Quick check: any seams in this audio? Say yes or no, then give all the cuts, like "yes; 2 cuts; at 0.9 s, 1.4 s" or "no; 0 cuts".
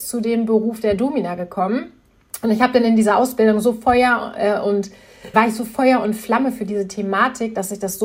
yes; 1 cut; at 5.3 s